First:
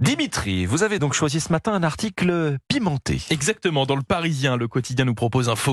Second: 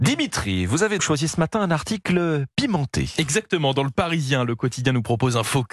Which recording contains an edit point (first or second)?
second